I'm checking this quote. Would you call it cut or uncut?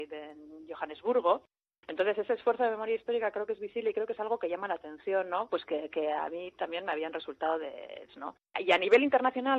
cut